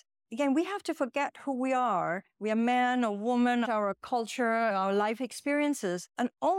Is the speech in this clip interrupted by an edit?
yes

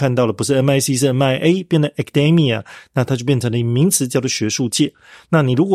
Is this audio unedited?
yes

